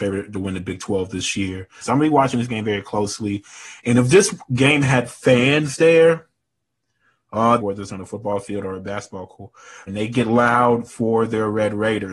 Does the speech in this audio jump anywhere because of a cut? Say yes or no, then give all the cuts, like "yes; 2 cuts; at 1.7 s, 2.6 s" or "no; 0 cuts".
yes; 3 cuts; at 1.8 s, 7.6 s, 9.9 s